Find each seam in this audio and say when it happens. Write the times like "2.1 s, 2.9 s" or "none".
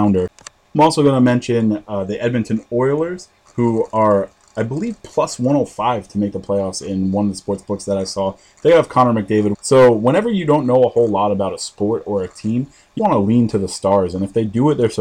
9.5 s, 13.0 s